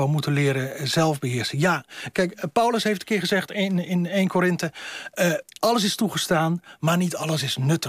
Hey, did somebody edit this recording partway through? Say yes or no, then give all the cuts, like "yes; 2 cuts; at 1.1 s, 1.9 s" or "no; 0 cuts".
no; 0 cuts